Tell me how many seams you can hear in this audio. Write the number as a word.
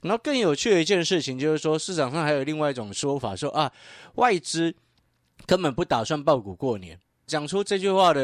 one